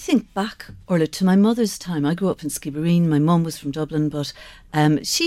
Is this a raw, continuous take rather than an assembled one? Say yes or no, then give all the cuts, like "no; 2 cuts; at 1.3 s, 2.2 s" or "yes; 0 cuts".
yes; 0 cuts